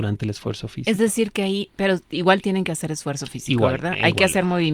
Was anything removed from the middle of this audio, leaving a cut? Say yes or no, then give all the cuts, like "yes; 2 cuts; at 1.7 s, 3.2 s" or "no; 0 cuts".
no; 0 cuts